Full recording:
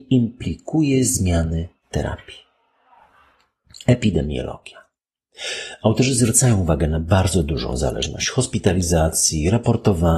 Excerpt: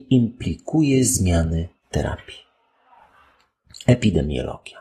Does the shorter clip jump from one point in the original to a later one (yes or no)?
no